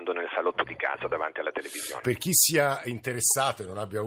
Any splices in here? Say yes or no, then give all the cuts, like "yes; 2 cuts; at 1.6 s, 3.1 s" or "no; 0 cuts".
yes; 1 cut; at 2.0 s